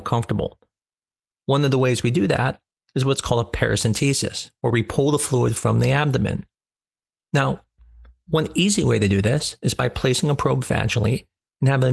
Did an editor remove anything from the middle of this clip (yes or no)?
yes